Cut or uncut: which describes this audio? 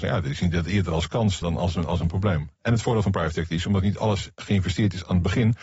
cut